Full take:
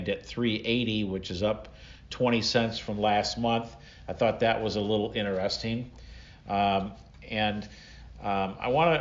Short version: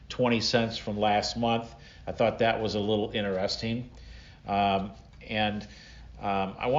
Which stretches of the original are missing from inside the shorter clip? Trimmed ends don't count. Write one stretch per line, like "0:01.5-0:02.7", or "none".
none

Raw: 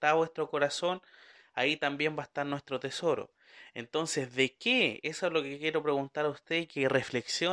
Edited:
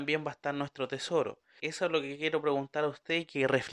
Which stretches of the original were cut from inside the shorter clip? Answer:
0:03.5-0:05.0

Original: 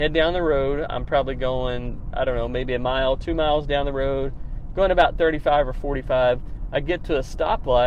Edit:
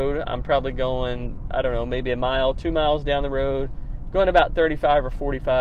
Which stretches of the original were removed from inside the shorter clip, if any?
none

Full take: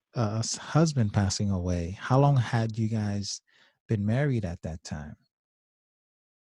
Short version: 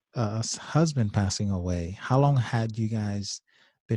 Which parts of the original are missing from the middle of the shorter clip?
none

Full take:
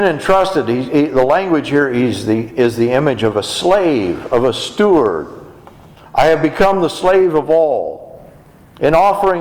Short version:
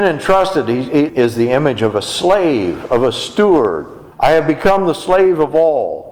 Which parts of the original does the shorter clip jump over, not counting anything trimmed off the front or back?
0:01.1-0:02.5
0:05.5-0:06.1

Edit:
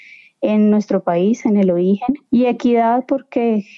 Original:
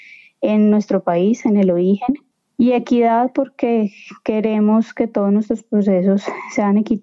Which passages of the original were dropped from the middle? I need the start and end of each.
0:02.2-0:02.5

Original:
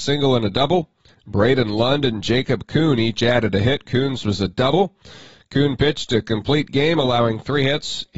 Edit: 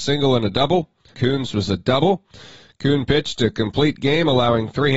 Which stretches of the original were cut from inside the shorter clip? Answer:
0:01.1-0:03.9

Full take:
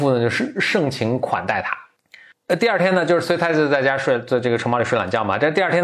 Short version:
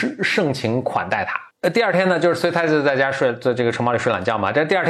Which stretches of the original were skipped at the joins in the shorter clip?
0:01.9-0:02.4

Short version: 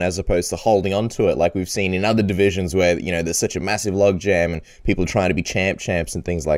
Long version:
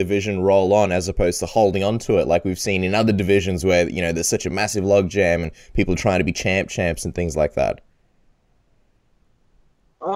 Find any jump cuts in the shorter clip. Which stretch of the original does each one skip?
none

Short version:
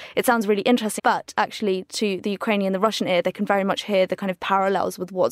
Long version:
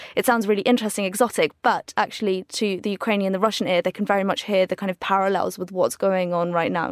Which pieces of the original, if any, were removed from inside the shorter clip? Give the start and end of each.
0:01.0-0:01.6

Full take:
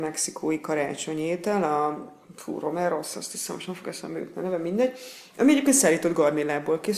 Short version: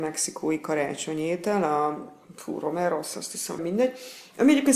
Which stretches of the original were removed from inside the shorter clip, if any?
0:03.6-0:04.6

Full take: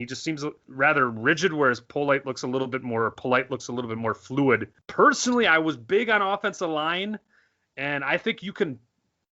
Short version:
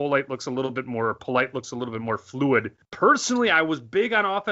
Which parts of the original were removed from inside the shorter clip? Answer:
none

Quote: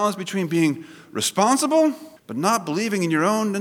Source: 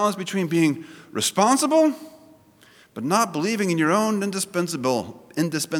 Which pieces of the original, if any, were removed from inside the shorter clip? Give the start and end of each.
0:02.2-0:02.8

